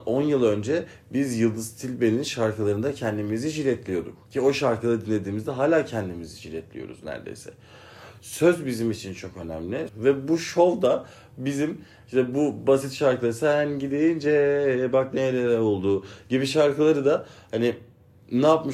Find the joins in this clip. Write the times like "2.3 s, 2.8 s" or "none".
4.2 s, 9.9 s